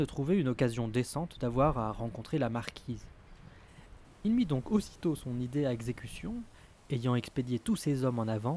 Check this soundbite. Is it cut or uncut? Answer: cut